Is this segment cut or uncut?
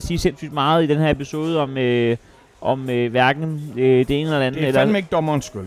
uncut